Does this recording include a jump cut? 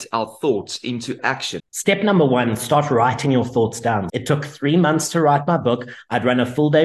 yes; 2 cuts; at 1.6 s, 4.1 s

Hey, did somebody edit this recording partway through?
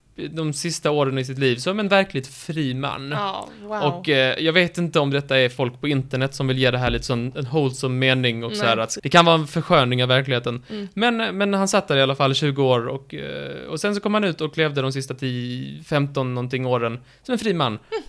yes; 1 cut; at 9.0 s

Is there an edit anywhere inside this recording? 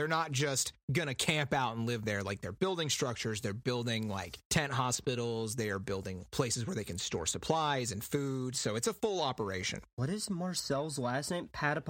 no; 0 cuts

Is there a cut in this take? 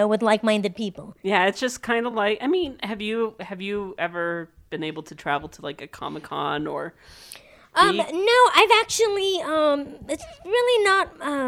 no; 0 cuts

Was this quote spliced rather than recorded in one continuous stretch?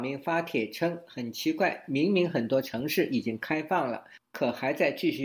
no; 0 cuts

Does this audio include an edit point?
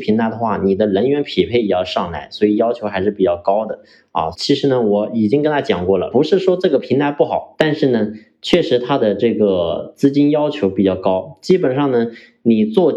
yes; 3 cuts; at 4.3 s, 6.1 s, 7.6 s

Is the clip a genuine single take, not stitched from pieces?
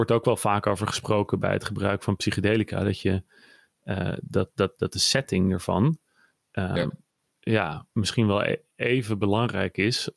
yes; 0 cuts

